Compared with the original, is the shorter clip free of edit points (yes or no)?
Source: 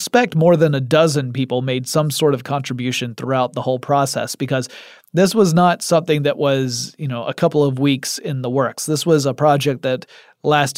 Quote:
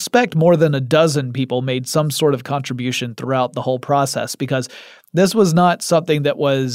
yes